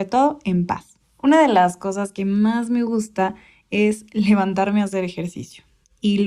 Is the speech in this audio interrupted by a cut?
yes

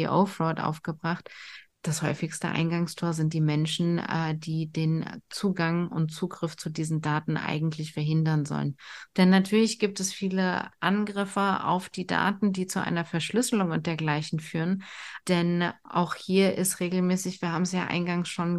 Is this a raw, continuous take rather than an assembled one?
no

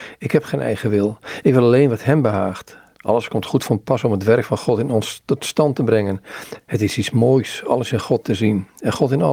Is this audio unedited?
no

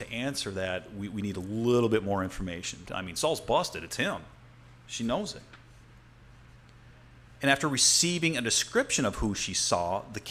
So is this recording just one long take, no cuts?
no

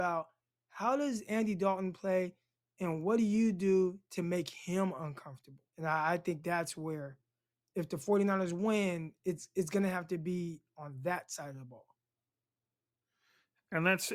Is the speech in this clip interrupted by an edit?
yes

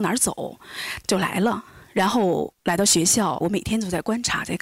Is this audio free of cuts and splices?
no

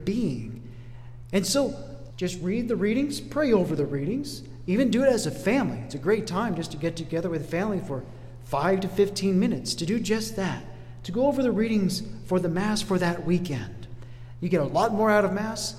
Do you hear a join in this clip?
yes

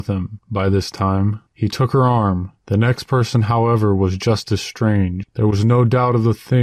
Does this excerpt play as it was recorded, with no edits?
no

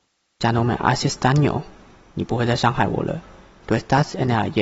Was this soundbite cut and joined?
yes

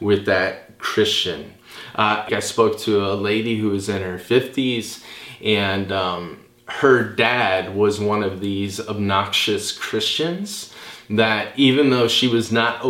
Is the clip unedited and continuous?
no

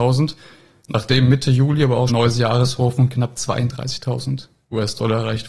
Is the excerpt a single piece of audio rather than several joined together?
no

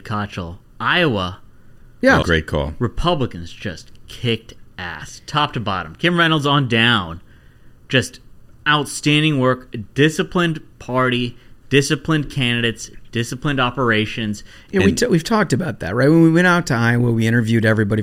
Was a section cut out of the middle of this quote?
yes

